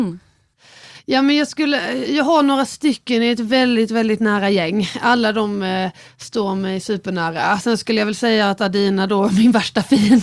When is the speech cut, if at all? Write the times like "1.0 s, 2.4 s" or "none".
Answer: none